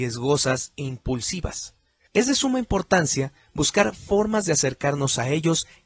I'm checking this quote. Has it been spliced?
yes; 1 cut; at 2.1 s

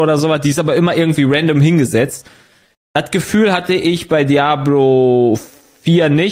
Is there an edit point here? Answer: no; 0 cuts

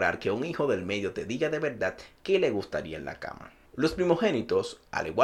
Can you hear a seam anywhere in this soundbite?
no; 0 cuts

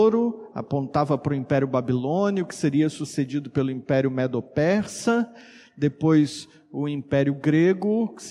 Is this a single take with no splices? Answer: yes; 0 cuts

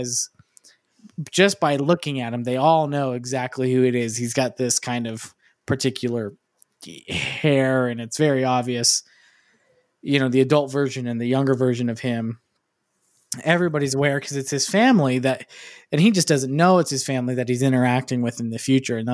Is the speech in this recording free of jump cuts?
yes; 0 cuts

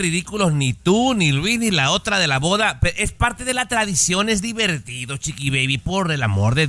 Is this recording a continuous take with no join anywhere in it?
yes; 0 cuts

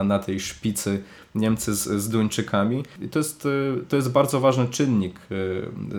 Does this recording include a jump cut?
yes; 1 cut; at 3.0 s

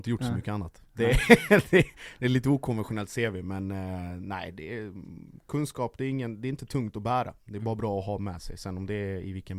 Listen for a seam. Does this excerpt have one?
no; 0 cuts

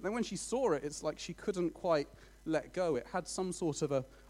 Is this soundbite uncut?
yes; 0 cuts

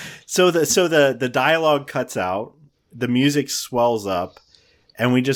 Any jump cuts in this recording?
no; 0 cuts

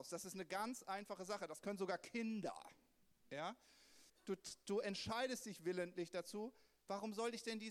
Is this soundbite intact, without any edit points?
no; 1 cut; at 4.1 s

